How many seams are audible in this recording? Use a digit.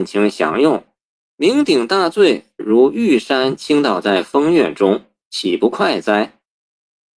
1